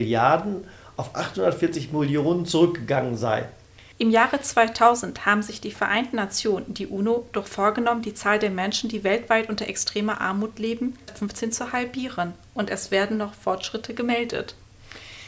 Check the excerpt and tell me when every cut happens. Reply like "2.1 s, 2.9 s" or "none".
3.9 s, 11.1 s

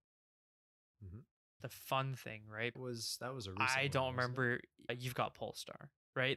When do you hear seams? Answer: 1.6 s, 2.7 s, 4.9 s

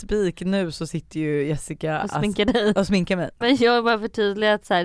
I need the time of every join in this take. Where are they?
3.4 s

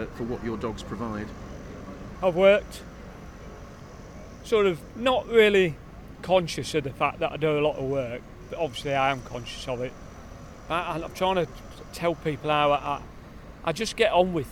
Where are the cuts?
2.2 s

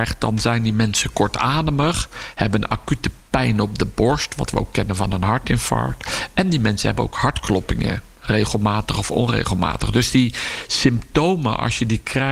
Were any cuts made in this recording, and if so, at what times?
none

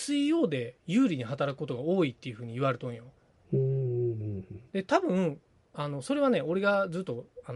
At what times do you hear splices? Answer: none

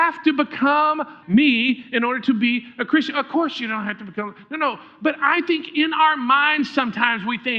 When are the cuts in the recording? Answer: 1.2 s

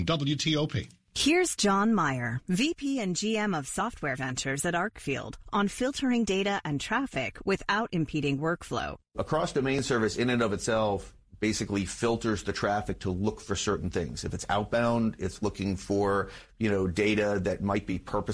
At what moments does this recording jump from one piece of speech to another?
none

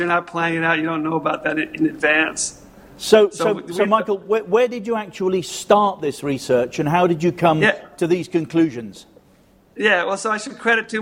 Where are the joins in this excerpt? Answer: none

